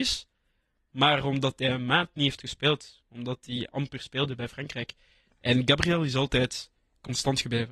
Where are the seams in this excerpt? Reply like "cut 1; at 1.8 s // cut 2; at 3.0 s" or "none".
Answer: none